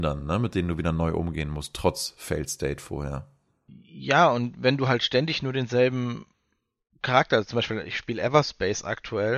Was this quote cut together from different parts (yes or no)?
no